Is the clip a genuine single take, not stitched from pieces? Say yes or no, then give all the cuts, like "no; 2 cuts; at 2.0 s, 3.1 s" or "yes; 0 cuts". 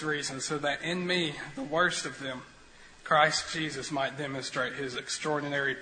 yes; 0 cuts